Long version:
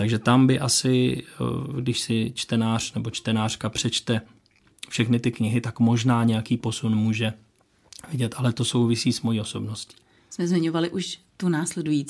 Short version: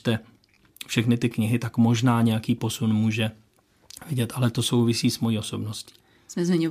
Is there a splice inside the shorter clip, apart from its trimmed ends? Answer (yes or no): no